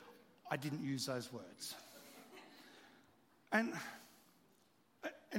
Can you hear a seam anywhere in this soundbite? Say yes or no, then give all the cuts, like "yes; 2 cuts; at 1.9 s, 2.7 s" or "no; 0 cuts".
no; 0 cuts